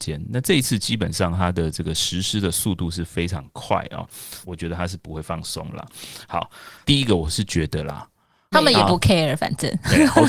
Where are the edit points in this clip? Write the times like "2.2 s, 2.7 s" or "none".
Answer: 4.4 s, 6.8 s, 8.5 s